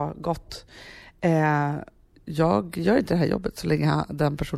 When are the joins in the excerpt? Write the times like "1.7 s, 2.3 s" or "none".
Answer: 2.1 s